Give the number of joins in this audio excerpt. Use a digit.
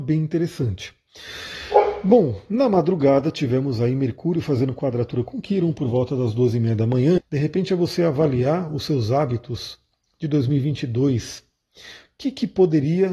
1